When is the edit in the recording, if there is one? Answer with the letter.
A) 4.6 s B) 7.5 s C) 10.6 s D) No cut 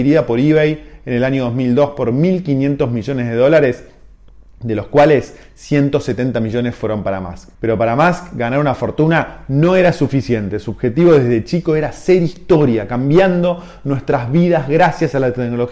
B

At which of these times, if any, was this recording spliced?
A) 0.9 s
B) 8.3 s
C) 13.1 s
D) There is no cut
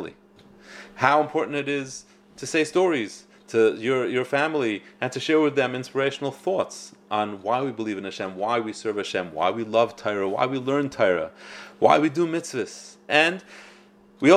C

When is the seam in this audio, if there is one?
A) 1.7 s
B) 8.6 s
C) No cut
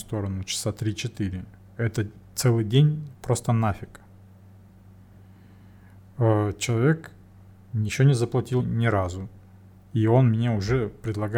B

